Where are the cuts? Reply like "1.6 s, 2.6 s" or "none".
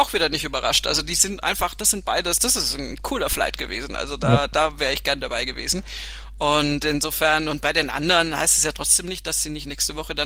none